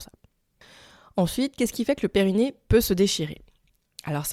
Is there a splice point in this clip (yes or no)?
no